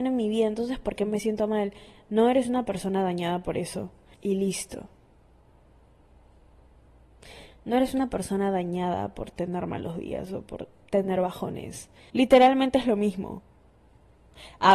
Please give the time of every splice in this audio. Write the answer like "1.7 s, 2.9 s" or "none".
4.1 s, 12.1 s